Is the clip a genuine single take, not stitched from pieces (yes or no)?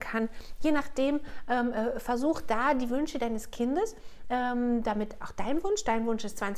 yes